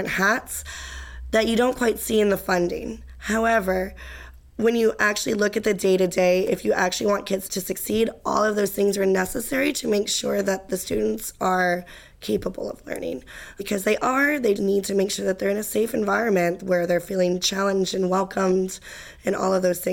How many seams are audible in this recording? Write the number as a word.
one